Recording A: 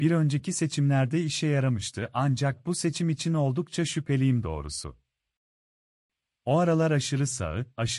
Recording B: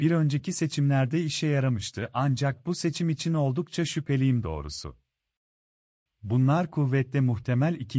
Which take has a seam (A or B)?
B